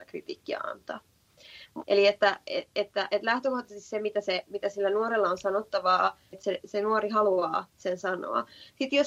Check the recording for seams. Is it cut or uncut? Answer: cut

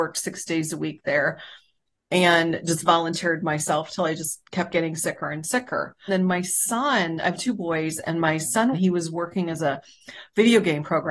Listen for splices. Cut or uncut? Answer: cut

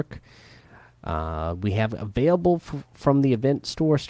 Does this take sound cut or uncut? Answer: uncut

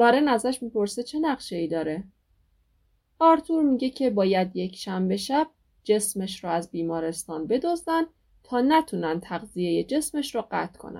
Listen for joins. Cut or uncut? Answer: uncut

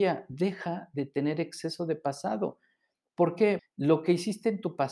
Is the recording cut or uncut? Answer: cut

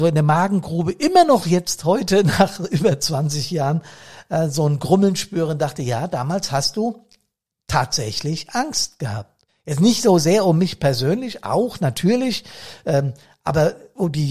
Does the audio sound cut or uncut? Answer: cut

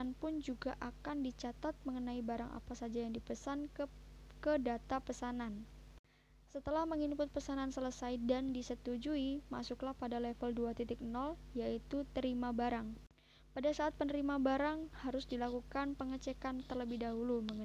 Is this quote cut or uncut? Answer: uncut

